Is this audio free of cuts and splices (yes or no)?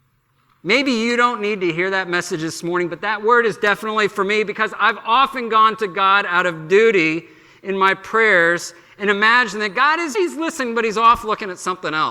no